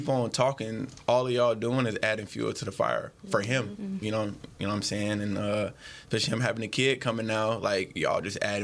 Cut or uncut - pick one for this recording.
uncut